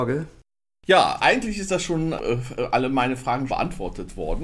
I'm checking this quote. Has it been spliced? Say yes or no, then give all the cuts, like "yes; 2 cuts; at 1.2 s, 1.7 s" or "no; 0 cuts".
yes; 2 cuts; at 2.2 s, 3.5 s